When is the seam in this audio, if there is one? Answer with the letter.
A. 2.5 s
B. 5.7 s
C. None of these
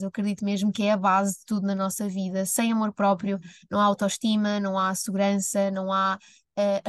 C